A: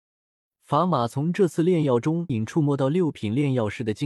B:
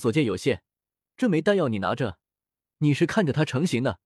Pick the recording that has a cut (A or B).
A